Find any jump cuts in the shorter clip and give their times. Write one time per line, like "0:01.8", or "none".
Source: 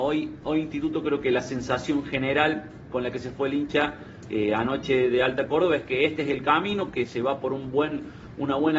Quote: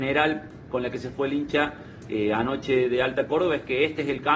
none